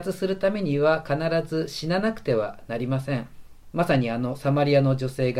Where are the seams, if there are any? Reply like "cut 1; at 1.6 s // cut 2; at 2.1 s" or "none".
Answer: cut 1; at 3.7 s